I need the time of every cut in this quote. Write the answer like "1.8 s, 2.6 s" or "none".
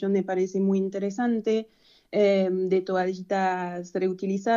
none

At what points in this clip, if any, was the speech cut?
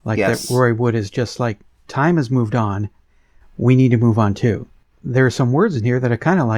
1.9 s

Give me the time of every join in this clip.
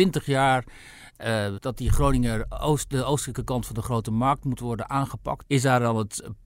1.6 s, 5.4 s

